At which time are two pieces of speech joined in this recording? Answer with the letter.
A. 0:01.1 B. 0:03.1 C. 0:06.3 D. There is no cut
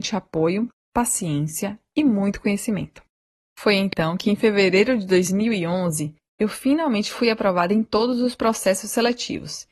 D